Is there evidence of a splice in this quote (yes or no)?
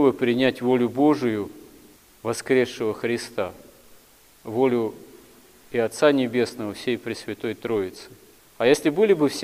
no